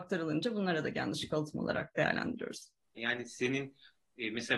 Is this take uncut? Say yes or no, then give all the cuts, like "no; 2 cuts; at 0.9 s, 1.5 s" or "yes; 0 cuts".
no; 1 cut; at 3.0 s